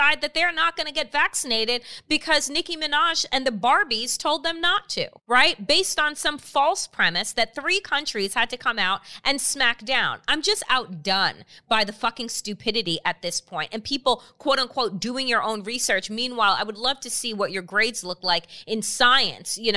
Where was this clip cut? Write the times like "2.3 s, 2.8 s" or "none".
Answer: 5.2 s